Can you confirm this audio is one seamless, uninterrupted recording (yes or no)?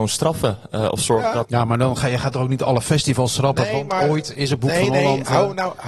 no